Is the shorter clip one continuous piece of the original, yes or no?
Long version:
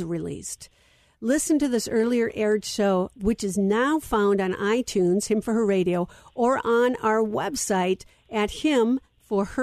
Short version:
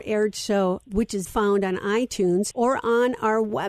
no